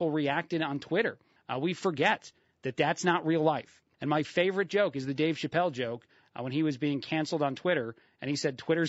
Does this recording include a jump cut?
yes; 2 cuts; at 1.4 s, 3.9 s

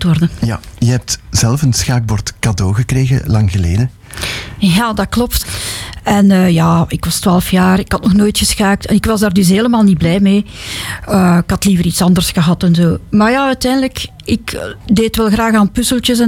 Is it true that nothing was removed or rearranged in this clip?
no; 1 cut; at 5.4 s

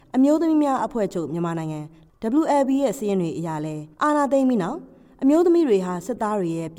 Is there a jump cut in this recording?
yes; 1 cut; at 3.9 s

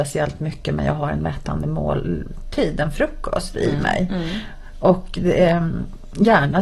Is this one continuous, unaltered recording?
yes; 0 cuts

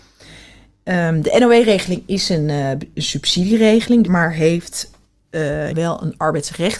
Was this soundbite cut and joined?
yes; 2 cuts; at 4.0 s, 5.7 s

